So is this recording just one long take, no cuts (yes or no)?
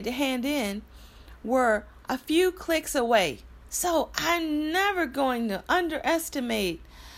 no